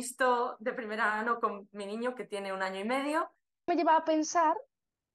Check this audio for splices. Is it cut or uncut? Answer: cut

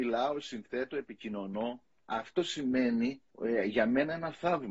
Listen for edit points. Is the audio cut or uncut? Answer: cut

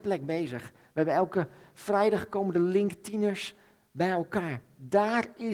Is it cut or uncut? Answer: uncut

